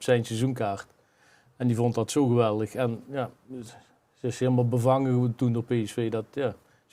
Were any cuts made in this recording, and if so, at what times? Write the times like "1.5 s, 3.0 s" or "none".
none